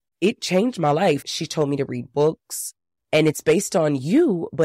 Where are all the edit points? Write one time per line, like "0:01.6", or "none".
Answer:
0:01.2
0:03.0

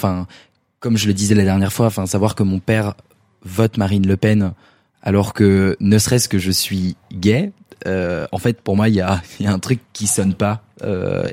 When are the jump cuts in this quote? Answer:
0:09.8

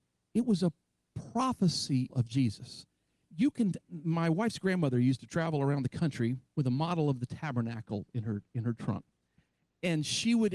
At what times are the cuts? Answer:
0:02.1
0:03.8
0:06.5

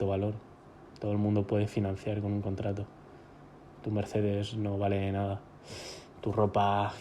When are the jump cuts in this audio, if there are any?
none

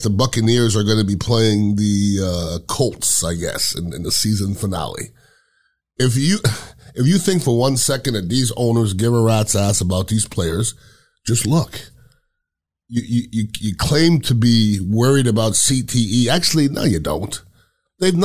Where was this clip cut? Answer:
none

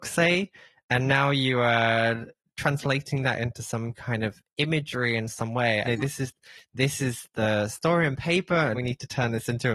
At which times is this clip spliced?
0:05.8
0:08.7

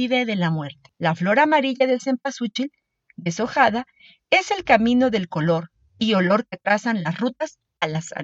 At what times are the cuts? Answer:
0:00.9

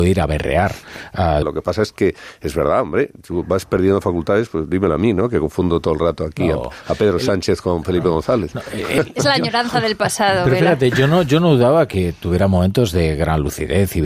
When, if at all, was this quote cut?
0:01.4

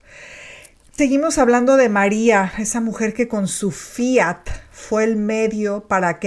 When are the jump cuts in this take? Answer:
0:01.0
0:02.5

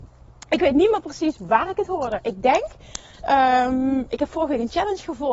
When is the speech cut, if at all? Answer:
none

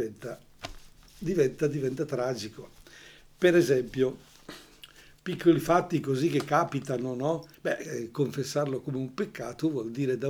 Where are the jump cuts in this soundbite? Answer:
0:07.5

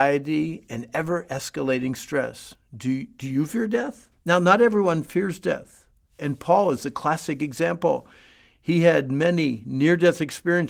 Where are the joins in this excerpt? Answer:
0:04.1

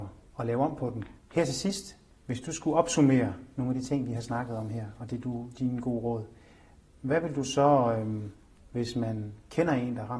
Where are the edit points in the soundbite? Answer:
0:01.2
0:08.6

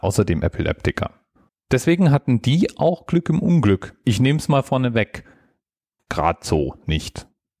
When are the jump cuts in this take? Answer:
0:01.5
0:06.0

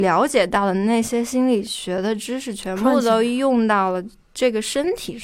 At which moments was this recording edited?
none

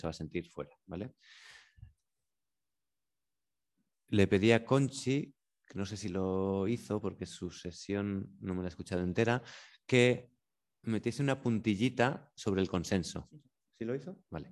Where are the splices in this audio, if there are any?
none

